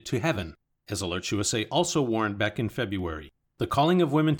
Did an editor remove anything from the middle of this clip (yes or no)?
no